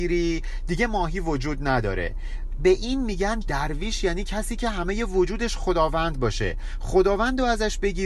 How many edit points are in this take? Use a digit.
1